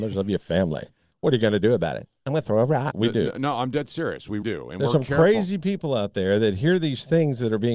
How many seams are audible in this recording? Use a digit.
2